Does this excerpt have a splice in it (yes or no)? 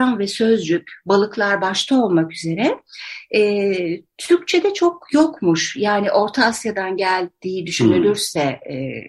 no